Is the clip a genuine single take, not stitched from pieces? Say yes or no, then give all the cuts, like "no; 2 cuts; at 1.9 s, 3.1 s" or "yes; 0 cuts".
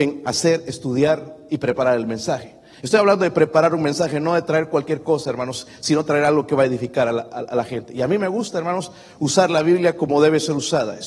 yes; 0 cuts